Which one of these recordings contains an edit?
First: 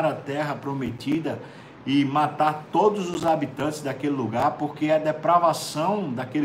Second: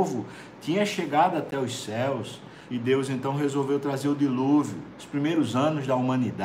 second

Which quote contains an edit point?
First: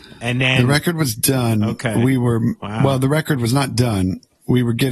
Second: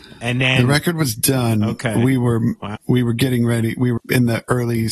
second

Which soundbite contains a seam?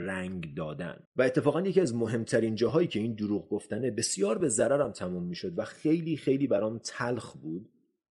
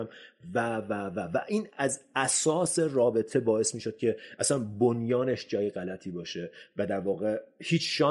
first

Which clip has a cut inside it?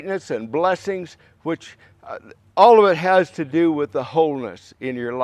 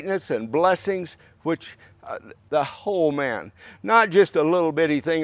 second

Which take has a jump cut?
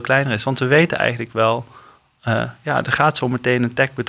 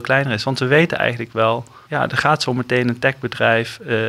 second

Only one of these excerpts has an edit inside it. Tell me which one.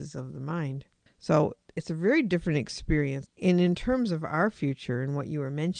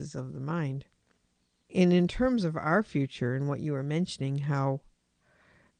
first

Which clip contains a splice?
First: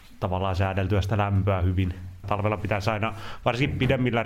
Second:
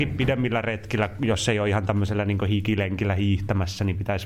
first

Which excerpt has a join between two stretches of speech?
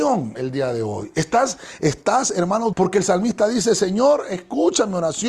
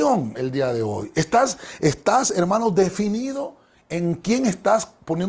first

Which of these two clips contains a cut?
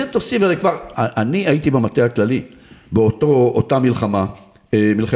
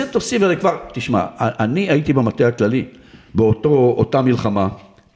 first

